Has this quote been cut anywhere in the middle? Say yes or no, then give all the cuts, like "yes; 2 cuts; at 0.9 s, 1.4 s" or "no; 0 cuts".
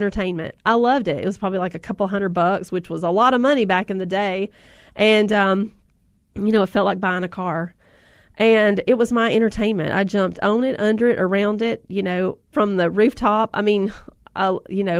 no; 0 cuts